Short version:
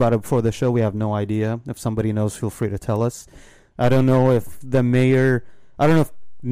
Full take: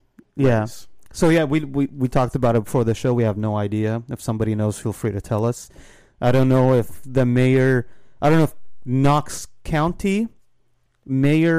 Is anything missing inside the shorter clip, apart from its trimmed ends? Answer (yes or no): no